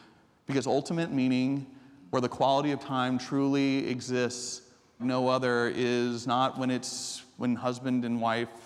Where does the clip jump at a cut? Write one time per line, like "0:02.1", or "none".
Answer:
0:05.0